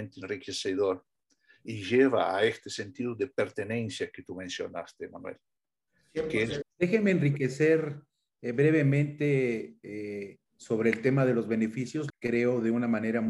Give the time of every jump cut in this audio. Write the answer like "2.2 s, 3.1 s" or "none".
6.6 s, 10.5 s, 12.1 s